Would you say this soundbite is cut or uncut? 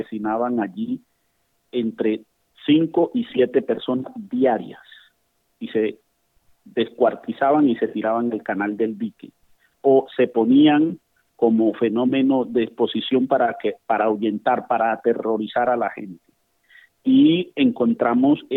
uncut